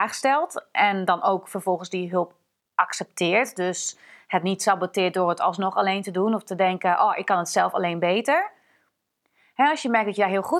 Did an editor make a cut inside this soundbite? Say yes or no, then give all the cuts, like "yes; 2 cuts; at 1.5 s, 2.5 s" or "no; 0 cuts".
no; 0 cuts